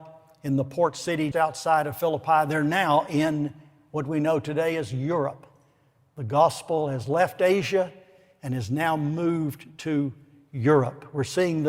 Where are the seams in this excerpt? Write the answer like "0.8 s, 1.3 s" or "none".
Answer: 1.3 s